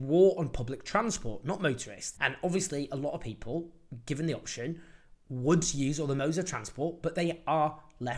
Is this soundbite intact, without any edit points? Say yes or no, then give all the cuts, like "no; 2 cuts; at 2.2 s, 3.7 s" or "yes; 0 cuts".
no; 1 cut; at 2.1 s